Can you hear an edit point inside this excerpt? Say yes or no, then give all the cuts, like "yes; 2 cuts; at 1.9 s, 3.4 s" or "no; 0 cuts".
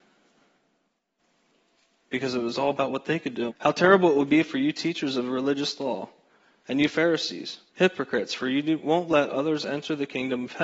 yes; 2 cuts; at 3.5 s, 7.7 s